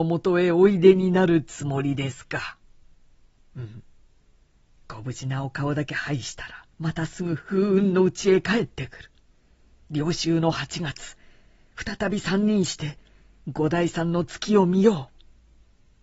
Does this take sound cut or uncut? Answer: cut